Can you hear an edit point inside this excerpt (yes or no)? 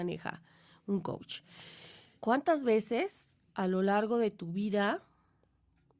yes